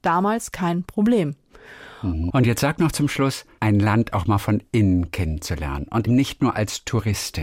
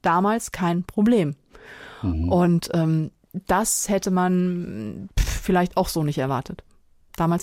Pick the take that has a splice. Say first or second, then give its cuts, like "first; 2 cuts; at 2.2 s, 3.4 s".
first; 3 cuts; at 2.3 s, 3.6 s, 6.1 s